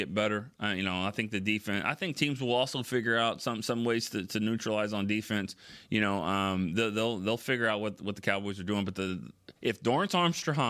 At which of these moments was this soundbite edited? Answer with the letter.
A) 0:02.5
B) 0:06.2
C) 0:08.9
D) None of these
D